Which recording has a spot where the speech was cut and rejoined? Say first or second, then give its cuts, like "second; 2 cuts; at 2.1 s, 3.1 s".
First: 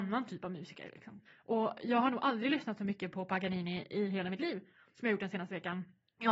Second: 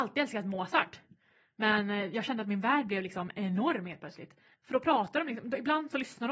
first; 1 cut; at 1.2 s